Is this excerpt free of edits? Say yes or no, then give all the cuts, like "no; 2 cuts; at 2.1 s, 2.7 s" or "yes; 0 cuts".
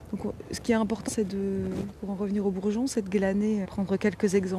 no; 2 cuts; at 1.1 s, 3.6 s